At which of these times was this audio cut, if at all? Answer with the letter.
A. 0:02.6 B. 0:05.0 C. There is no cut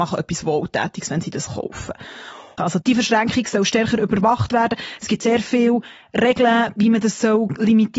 A